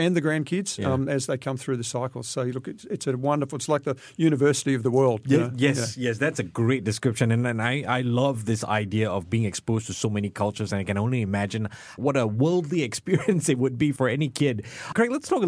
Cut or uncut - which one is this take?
uncut